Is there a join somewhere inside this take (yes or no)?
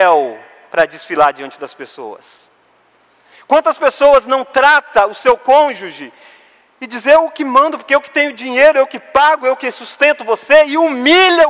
no